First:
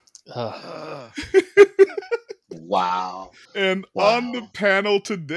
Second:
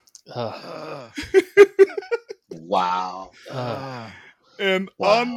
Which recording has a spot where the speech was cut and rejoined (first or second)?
first